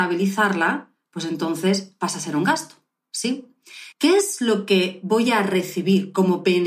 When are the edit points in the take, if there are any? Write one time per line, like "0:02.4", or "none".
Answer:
0:03.9

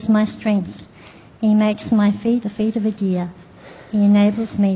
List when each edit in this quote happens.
0:02.4

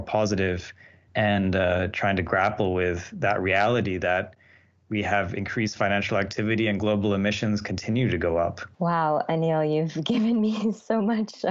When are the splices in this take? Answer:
0:08.7

